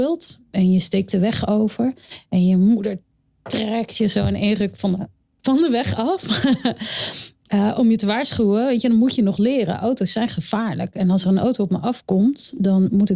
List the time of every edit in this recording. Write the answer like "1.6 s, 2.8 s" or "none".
none